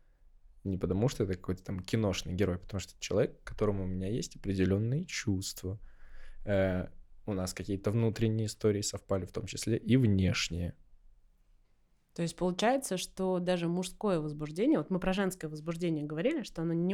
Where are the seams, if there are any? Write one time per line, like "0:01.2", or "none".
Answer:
none

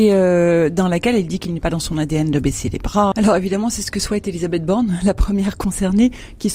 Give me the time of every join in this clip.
0:03.1

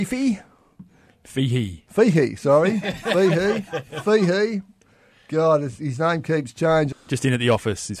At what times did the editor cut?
0:06.9

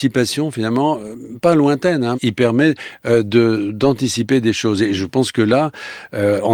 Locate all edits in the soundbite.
0:02.1

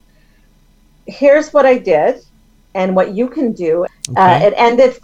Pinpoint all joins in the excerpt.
0:03.9

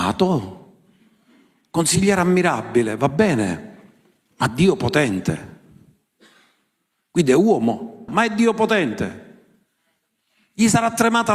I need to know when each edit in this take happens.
0:08.1

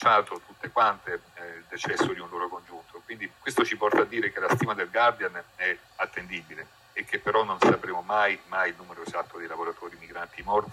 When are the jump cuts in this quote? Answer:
0:03.4
0:05.8

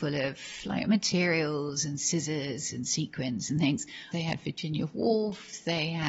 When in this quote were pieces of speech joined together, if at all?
0:04.1

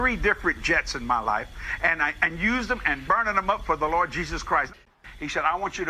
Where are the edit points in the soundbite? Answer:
0:03.1

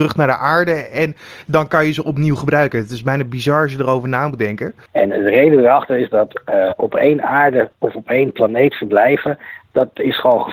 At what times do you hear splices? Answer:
0:04.9

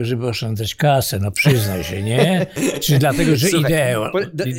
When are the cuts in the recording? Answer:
none

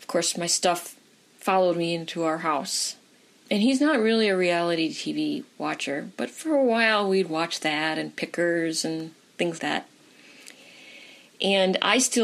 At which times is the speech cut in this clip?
0:03.4
0:09.6

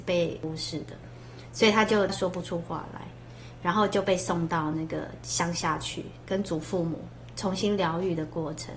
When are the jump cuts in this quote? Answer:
none

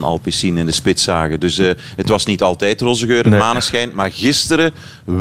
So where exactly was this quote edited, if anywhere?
none

